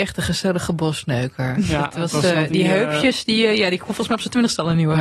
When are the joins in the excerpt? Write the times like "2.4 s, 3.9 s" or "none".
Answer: 2.3 s